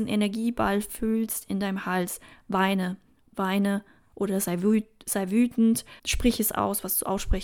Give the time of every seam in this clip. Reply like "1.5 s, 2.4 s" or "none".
6.0 s